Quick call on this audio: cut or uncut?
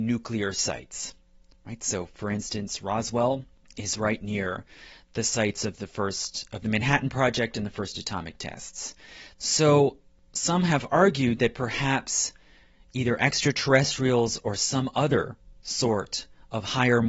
cut